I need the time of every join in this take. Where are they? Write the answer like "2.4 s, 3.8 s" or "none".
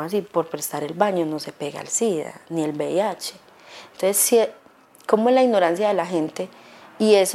none